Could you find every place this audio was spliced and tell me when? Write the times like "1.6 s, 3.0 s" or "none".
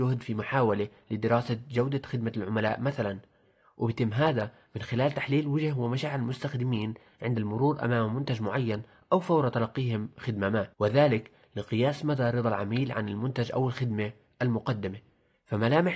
10.7 s